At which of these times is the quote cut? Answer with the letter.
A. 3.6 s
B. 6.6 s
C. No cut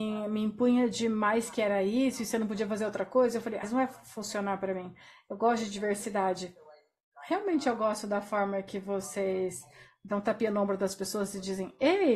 A